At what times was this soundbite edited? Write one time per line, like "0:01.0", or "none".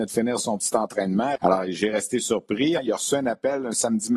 0:01.4
0:02.8